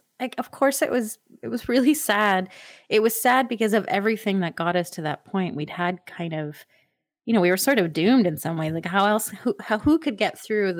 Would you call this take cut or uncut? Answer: uncut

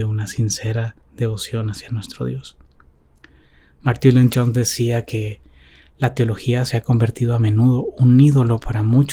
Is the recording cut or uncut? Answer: uncut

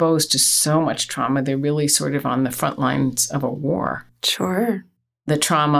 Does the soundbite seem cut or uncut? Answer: uncut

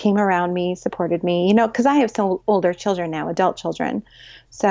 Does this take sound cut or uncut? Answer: uncut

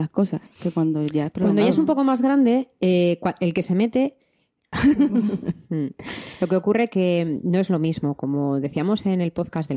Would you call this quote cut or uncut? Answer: cut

